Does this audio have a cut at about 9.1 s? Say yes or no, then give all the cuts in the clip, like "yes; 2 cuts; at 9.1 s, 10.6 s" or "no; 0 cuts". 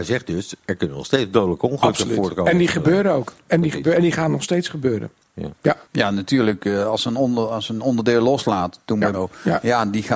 yes; 2 cuts; at 5.8 s, 9.1 s